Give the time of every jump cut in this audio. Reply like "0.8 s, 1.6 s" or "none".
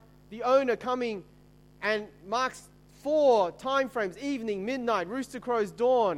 none